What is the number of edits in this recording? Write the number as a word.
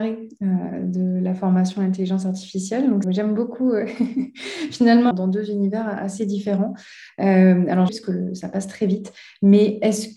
three